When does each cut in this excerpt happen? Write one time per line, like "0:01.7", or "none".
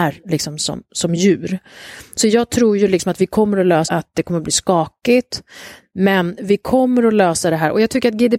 0:03.8